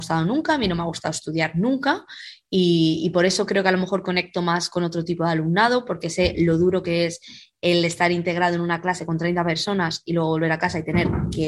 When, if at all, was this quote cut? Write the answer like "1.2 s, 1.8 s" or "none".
none

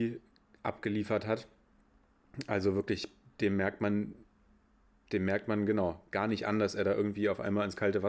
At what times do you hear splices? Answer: none

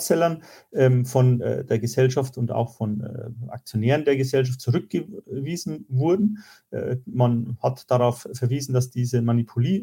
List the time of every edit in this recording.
none

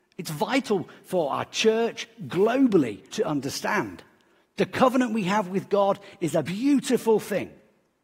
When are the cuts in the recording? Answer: 3.1 s, 6.4 s

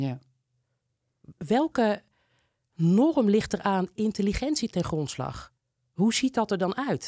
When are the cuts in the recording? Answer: none

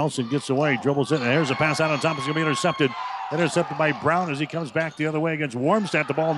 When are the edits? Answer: none

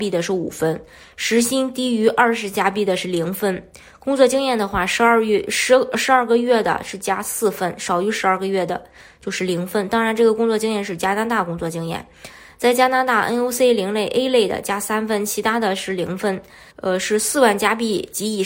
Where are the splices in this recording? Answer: 16.7 s

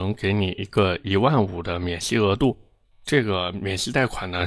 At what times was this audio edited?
none

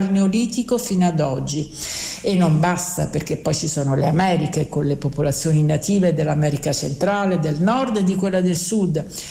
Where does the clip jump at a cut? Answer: none

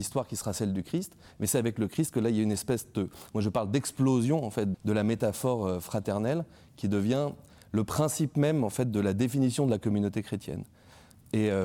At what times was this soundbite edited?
4.7 s

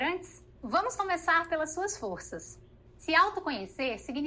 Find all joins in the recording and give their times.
2.9 s

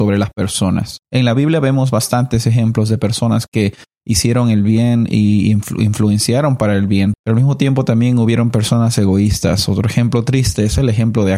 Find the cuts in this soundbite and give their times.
1.0 s, 7.1 s

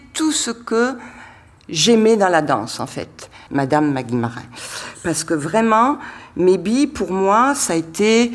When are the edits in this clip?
3.5 s

